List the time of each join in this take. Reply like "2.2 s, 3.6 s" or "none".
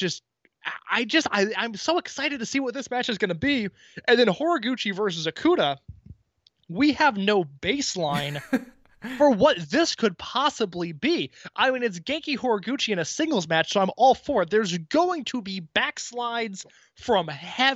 none